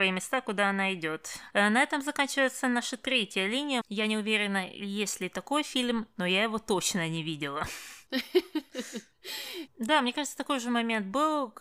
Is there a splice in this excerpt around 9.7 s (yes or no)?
yes